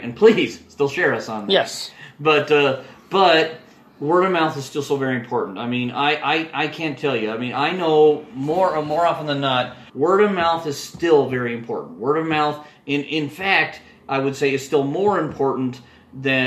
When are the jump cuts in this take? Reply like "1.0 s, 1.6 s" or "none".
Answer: 9.9 s